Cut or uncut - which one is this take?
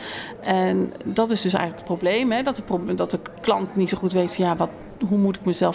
uncut